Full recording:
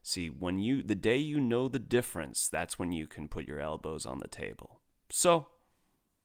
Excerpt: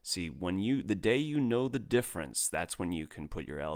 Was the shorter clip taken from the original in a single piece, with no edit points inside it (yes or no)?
yes